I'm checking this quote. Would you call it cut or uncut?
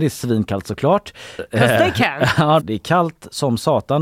cut